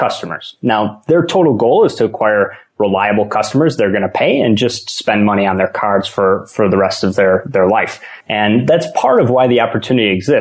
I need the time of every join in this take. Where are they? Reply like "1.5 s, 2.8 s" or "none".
8.2 s